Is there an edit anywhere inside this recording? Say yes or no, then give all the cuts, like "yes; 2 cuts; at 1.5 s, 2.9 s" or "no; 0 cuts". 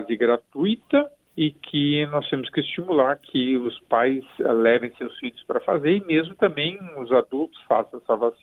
no; 0 cuts